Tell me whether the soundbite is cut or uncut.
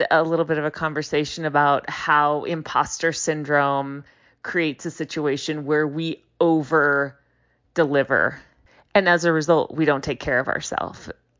uncut